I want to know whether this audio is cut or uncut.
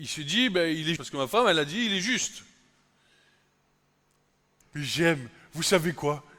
cut